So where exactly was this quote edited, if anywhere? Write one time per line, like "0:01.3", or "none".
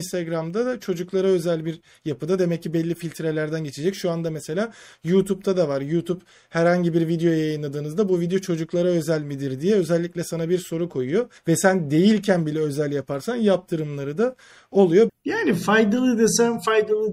0:11.4
0:15.1